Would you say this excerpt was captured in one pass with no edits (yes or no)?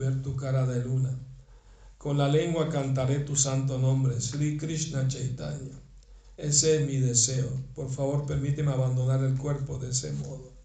yes